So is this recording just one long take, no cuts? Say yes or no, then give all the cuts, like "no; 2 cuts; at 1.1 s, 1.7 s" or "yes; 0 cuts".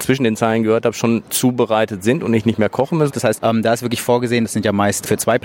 no; 2 cuts; at 3.1 s, 4.4 s